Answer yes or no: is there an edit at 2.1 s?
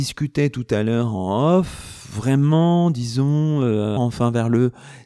no